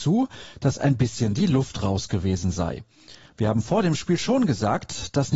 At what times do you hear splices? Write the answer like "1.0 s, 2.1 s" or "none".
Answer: none

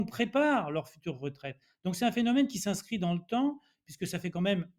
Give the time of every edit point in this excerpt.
none

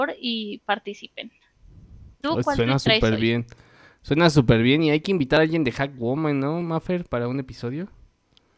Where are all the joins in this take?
none

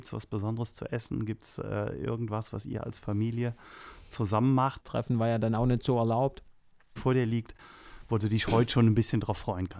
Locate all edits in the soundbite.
4.8 s, 7.0 s

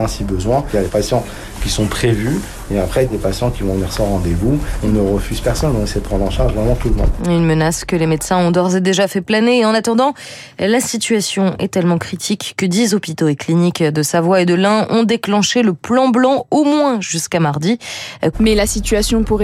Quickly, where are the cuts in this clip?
7.2 s, 18.3 s

